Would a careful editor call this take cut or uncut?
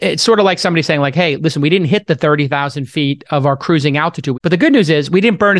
cut